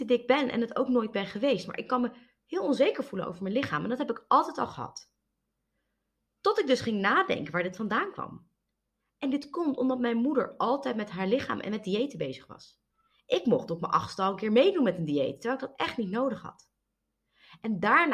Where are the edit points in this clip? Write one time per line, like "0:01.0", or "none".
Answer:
none